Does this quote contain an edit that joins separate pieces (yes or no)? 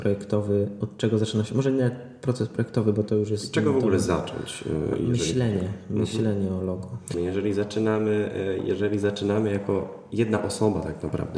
yes